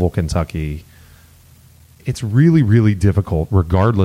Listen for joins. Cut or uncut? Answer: uncut